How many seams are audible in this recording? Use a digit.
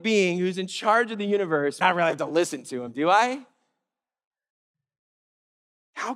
1